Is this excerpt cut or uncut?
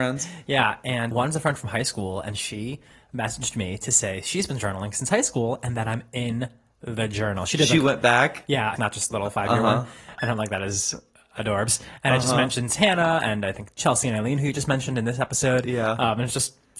cut